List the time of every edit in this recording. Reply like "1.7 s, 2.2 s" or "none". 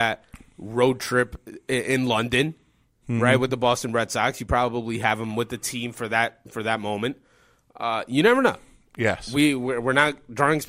none